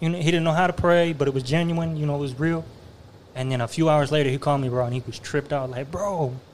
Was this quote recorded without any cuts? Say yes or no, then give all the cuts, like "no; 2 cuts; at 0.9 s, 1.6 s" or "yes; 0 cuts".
yes; 0 cuts